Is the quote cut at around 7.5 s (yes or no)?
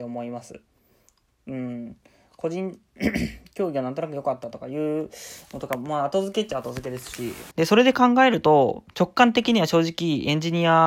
yes